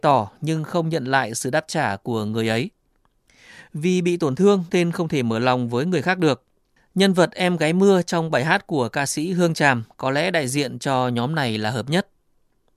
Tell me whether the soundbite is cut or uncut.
uncut